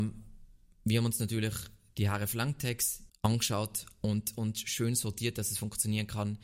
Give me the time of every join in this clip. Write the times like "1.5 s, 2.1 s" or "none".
3.1 s